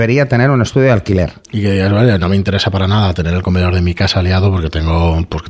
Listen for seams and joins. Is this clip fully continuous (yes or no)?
yes